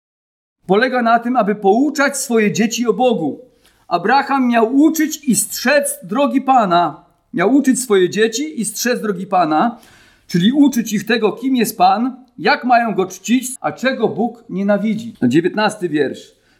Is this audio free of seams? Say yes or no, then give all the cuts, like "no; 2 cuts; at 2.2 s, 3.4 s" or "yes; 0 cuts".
no; 2 cuts; at 13.6 s, 15.1 s